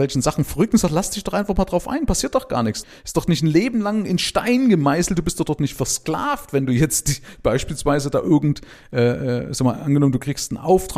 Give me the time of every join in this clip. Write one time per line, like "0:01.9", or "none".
none